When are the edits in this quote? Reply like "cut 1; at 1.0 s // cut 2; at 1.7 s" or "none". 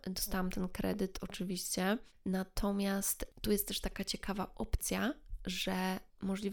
none